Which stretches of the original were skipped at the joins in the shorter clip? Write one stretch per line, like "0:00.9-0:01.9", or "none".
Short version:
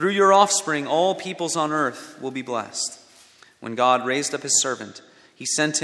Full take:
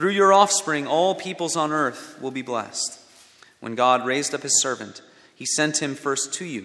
none